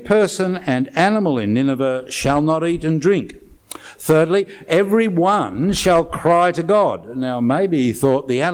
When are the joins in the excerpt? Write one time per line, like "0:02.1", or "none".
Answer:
0:03.6